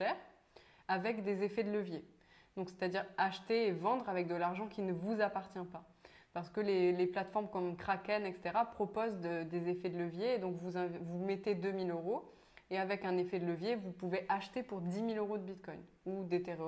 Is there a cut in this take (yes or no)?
no